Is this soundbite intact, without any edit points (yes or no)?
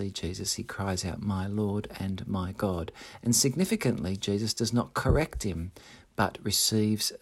yes